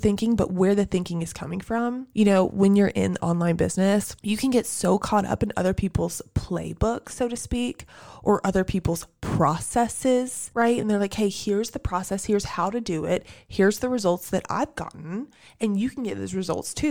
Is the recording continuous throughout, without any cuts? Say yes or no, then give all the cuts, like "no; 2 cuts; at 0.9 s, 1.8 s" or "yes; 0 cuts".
yes; 0 cuts